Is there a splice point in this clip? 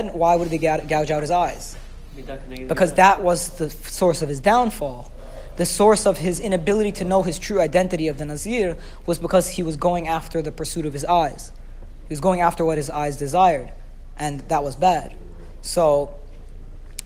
no; 0 cuts

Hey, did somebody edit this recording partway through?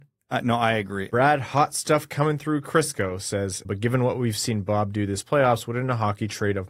yes; 2 cuts; at 1.1 s, 3.6 s

